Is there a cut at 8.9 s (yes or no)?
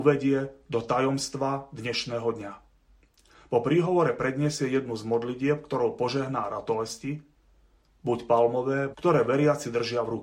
yes